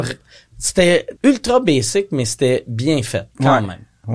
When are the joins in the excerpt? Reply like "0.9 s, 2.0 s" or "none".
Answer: 1.2 s

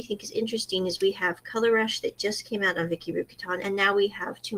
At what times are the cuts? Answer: none

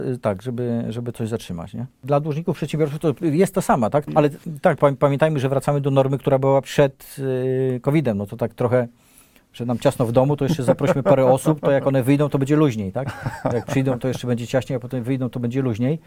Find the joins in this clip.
4.1 s

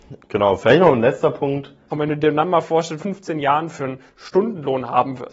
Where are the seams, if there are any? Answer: 1.9 s, 3.0 s

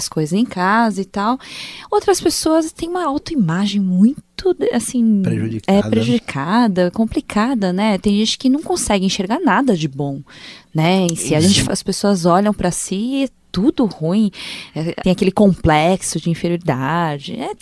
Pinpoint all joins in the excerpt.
11.6 s, 15.0 s

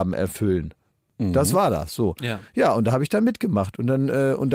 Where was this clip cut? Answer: none

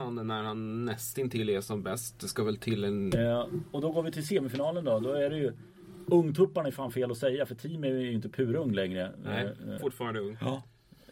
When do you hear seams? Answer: 3.1 s, 9.8 s

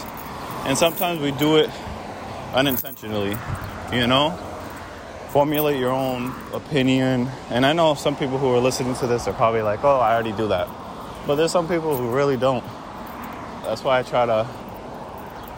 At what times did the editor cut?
5.3 s, 13.6 s

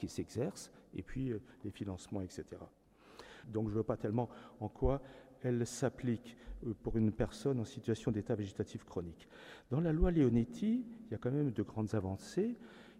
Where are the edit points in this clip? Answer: 3.4 s

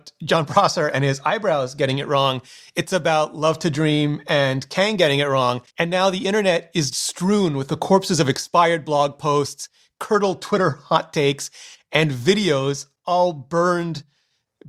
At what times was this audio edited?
5.7 s, 6.9 s

